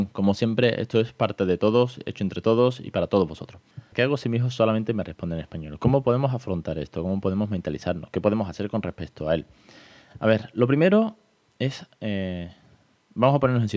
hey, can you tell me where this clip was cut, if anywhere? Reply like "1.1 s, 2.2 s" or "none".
3.9 s